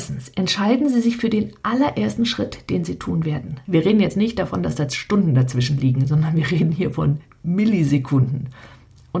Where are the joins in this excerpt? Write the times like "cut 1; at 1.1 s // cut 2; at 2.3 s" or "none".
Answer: cut 1; at 3.7 s